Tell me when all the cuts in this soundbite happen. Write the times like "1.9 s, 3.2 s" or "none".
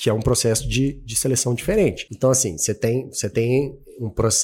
none